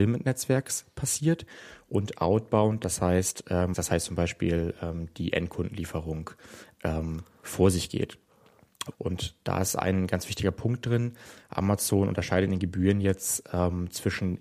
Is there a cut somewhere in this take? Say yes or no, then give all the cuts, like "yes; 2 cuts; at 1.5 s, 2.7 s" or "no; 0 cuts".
yes; 2 cuts; at 3.7 s, 8.9 s